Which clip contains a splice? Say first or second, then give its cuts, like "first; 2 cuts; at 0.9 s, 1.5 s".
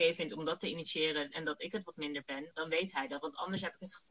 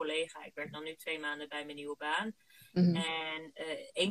first; 1 cut; at 2.5 s